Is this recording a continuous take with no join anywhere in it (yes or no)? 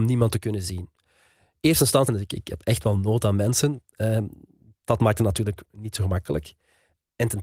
no